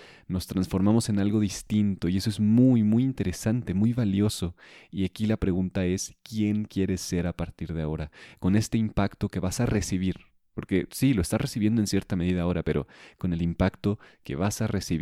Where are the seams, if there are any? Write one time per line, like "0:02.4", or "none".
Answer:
none